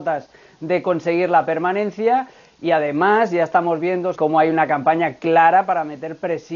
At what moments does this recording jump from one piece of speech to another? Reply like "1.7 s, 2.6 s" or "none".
4.1 s